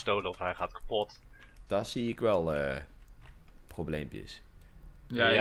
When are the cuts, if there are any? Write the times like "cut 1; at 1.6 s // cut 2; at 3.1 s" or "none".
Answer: cut 1; at 1.7 s